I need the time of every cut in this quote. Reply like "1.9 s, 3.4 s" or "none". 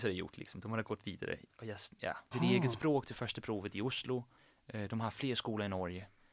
2.3 s